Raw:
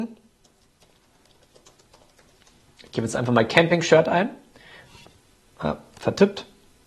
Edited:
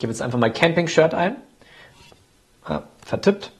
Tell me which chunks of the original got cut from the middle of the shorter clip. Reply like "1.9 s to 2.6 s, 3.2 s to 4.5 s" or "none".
none